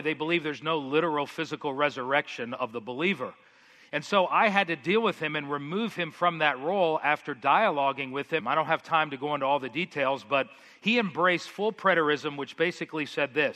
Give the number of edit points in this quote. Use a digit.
1